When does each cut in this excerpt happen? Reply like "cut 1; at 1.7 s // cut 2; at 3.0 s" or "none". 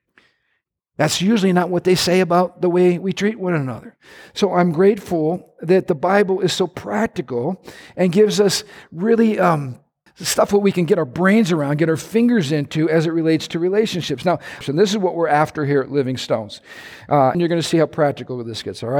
cut 1; at 10.1 s // cut 2; at 14.6 s // cut 3; at 17.3 s